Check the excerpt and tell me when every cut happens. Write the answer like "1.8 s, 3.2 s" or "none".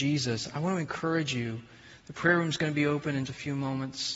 3.2 s

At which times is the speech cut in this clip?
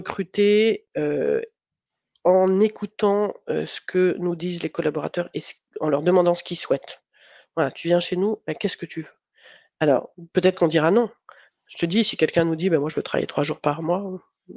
none

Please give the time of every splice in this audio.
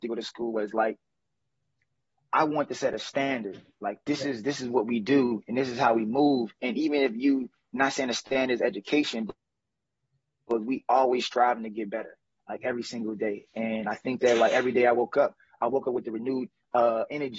none

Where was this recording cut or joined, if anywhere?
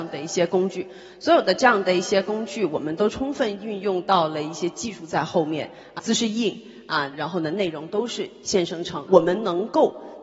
6.0 s, 7.1 s, 9.1 s

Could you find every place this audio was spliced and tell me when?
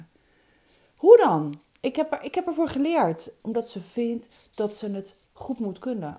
3.4 s

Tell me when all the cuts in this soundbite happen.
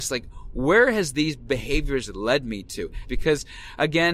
3.0 s

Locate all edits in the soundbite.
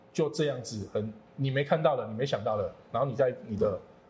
1.3 s

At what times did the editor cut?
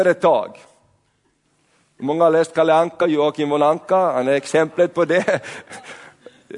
none

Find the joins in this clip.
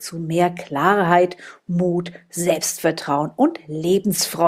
none

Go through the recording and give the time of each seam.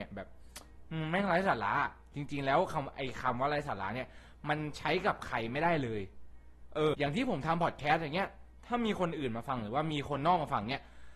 6.9 s

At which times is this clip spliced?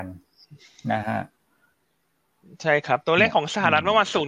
none

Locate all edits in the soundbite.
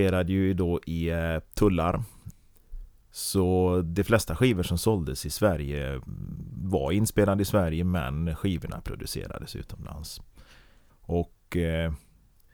3.1 s, 10.9 s

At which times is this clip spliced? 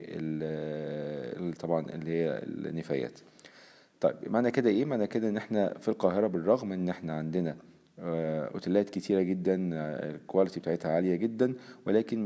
none

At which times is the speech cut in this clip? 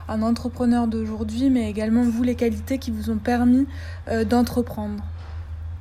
none

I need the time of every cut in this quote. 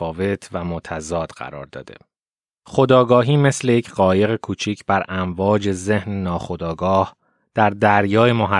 none

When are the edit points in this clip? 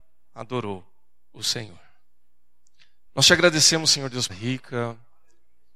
3.1 s, 4.3 s

